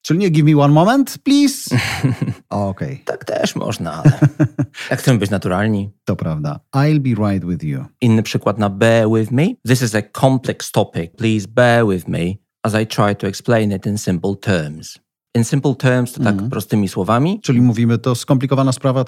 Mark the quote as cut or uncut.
cut